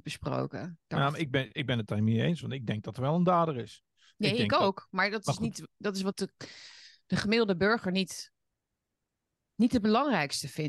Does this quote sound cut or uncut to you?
uncut